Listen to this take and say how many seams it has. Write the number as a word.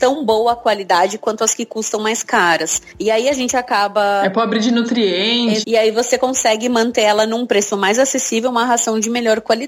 one